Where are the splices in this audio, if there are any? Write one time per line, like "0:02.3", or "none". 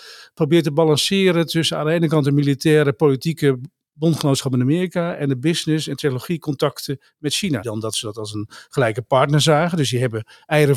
0:07.6